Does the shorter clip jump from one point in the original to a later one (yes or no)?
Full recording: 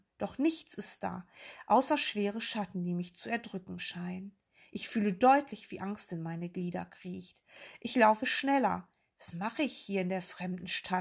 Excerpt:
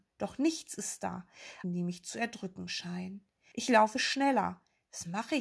yes